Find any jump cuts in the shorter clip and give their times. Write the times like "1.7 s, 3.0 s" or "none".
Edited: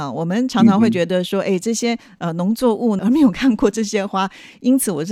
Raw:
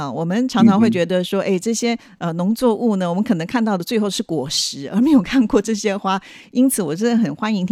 3.0 s